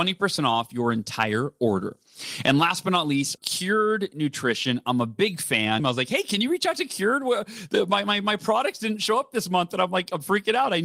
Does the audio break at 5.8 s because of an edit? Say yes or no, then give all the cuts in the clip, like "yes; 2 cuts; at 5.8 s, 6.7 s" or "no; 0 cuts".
yes; 2 cuts; at 3.4 s, 5.8 s